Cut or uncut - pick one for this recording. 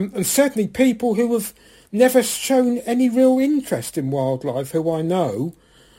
uncut